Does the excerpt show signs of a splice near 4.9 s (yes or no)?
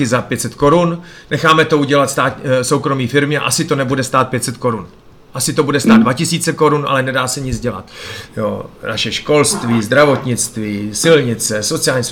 no